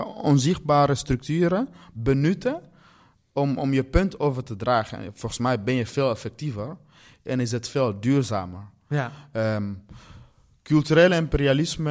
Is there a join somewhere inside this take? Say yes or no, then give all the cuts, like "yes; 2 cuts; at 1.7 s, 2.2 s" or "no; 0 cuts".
no; 0 cuts